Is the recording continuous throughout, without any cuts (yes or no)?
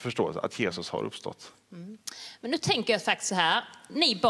yes